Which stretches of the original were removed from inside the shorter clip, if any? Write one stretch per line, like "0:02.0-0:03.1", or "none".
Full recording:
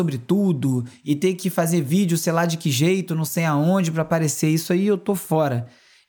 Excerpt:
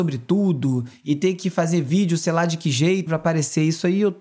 0:03.1-0:03.9